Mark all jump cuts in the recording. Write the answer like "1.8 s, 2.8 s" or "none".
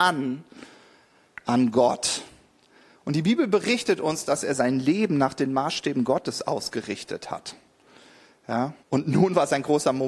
8.8 s